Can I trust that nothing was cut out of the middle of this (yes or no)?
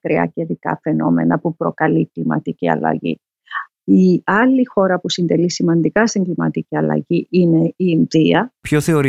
no